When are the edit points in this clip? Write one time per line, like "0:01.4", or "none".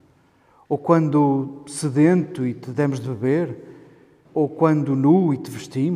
0:04.3